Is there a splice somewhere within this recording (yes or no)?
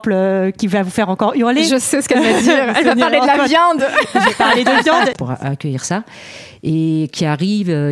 yes